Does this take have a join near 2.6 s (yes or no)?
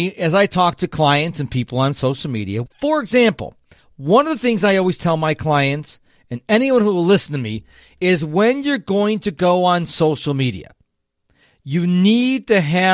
yes